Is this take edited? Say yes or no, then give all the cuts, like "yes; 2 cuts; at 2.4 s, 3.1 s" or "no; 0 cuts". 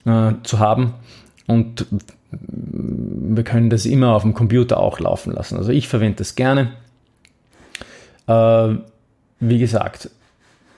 no; 0 cuts